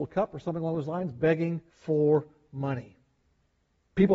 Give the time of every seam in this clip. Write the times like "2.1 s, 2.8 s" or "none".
1.7 s